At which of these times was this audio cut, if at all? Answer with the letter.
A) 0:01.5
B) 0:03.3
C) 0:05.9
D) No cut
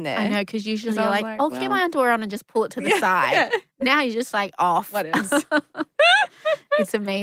D